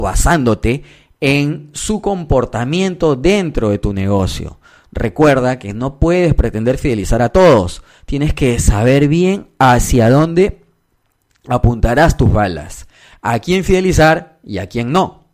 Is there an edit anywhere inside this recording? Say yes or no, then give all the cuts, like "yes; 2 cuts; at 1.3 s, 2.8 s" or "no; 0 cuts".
no; 0 cuts